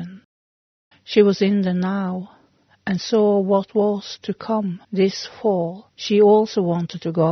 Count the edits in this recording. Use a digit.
3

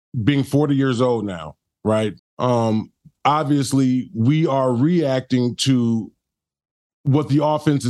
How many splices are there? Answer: 1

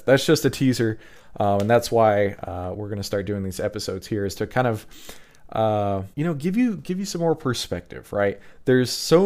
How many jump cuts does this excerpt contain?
1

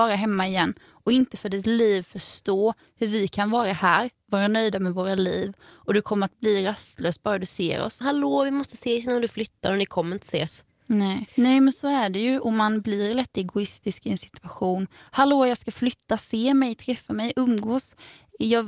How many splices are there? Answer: 2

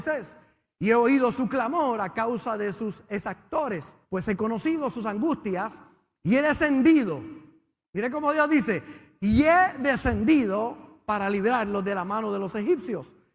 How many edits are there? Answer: 1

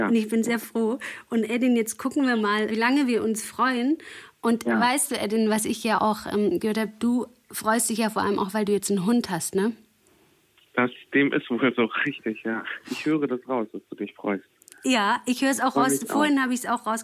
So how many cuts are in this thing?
2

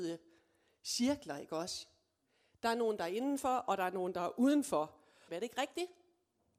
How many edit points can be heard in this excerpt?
1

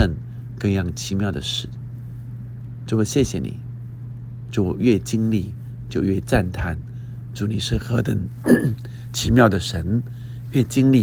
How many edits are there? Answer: 0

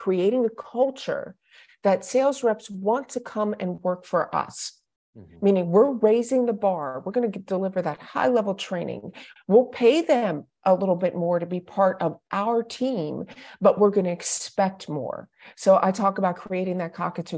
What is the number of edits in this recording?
1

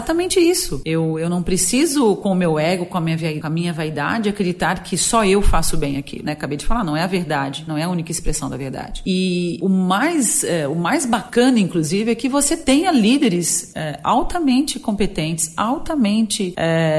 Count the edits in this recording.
0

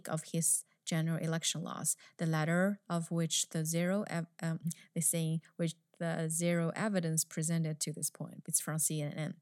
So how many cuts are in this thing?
2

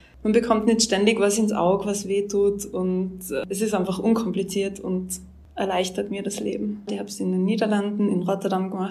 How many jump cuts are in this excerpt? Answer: 1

